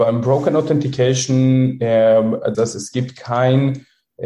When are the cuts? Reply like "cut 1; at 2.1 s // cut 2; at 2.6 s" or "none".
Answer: cut 1; at 2.5 s

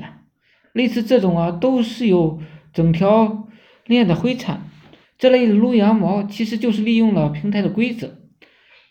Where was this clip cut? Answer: cut 1; at 5.0 s

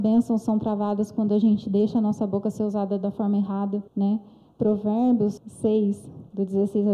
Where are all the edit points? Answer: cut 1; at 3.9 s // cut 2; at 5.4 s

